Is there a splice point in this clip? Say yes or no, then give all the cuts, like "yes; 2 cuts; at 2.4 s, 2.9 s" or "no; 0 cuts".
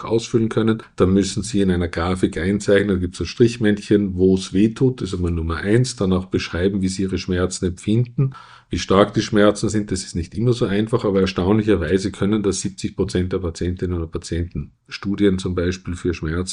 no; 0 cuts